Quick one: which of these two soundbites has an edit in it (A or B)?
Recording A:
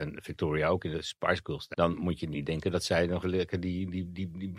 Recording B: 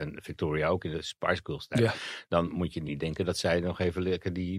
A